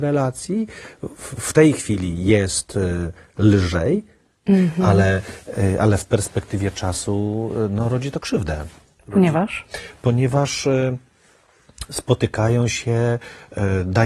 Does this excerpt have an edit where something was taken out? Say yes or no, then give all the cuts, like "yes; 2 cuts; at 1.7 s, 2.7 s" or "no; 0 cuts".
no; 0 cuts